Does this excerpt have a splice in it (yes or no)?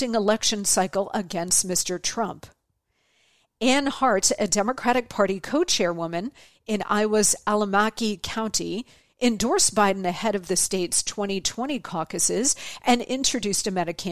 no